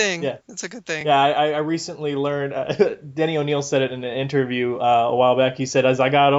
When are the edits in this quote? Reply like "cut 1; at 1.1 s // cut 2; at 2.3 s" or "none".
none